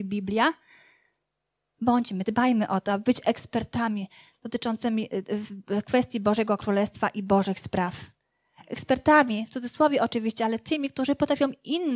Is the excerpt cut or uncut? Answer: uncut